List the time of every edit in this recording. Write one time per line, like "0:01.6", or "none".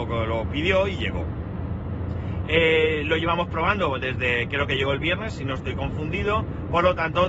none